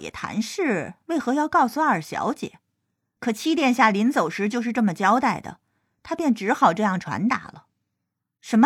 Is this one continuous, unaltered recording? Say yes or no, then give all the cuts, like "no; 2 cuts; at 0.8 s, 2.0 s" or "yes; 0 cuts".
yes; 0 cuts